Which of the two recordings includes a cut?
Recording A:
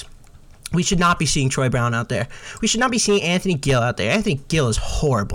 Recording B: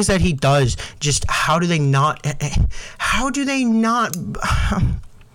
A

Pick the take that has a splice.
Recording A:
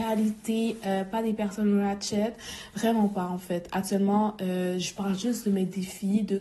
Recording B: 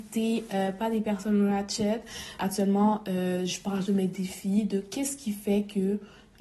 B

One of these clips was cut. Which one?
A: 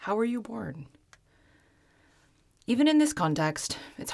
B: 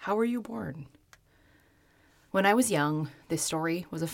B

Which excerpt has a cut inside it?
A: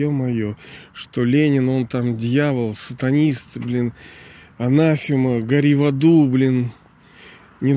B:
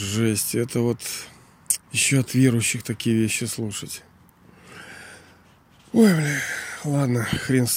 B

